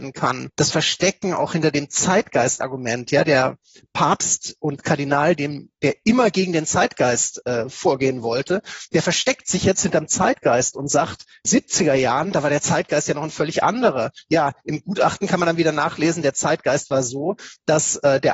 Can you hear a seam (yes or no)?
yes